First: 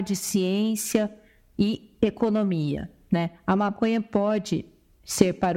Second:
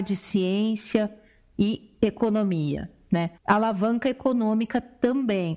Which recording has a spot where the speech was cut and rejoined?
second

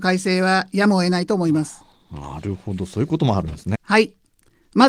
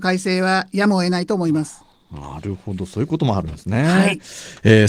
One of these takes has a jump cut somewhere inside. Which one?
first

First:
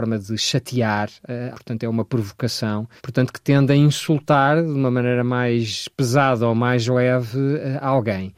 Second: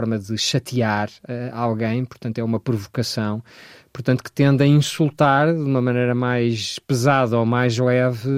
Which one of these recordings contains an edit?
first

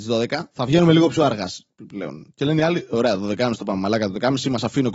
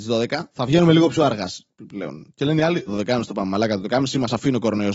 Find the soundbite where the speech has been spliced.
second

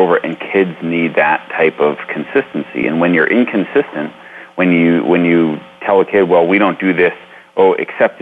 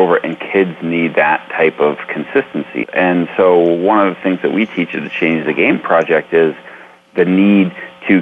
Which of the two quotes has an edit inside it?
second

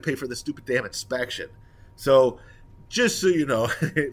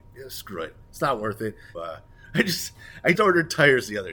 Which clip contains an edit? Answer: second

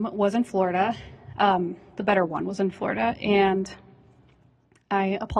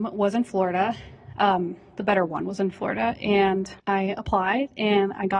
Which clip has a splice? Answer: second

